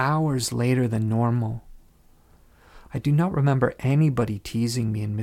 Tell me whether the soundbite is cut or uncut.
cut